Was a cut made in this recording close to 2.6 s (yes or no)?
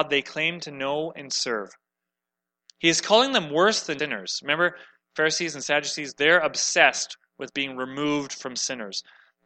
no